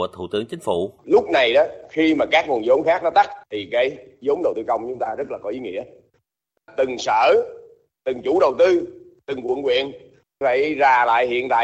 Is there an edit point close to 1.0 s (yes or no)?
yes